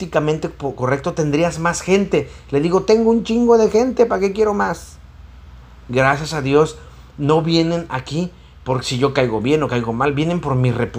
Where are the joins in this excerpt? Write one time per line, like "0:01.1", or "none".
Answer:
none